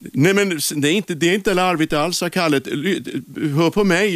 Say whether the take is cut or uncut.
uncut